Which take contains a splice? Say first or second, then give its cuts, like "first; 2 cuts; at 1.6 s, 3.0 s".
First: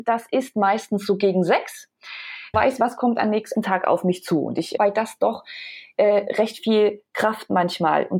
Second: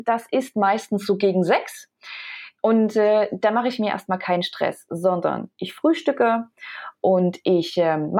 first; 3 cuts; at 2.5 s, 3.5 s, 4.8 s